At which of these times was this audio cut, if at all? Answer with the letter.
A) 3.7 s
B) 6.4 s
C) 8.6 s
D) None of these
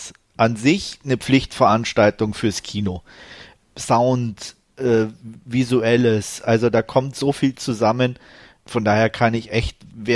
D